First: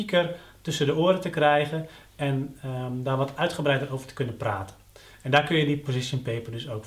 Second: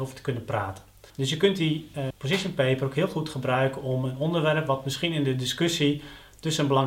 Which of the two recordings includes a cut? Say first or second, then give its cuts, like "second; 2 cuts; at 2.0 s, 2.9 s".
second; 2 cuts; at 1.1 s, 2.1 s